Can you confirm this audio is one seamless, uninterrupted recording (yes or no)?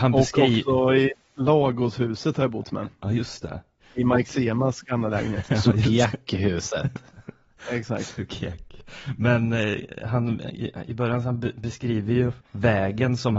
no